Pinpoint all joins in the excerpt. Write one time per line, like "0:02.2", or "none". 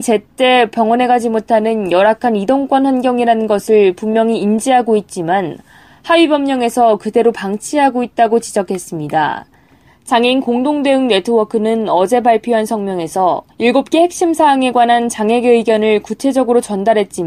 0:09.9
0:13.5